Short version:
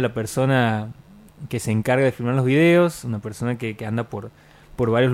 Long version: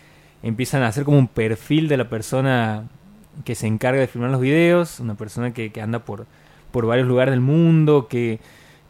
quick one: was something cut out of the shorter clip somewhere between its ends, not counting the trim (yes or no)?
no